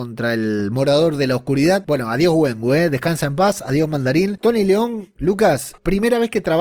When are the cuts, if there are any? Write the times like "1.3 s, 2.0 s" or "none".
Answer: none